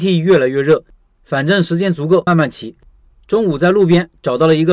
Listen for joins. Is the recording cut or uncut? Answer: cut